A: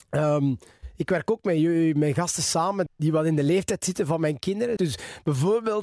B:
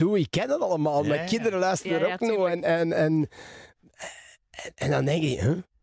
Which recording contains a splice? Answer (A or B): A